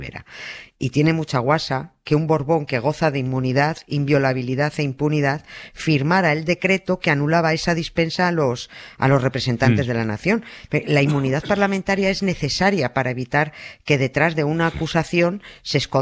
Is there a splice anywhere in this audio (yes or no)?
no